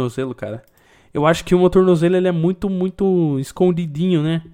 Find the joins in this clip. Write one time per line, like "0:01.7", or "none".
none